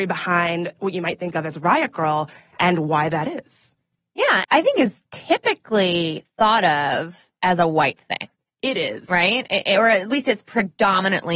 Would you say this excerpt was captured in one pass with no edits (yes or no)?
no